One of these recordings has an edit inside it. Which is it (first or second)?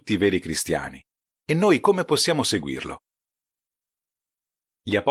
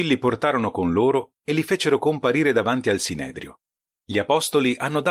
second